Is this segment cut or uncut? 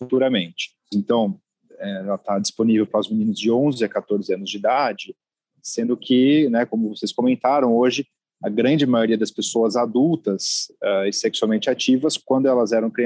cut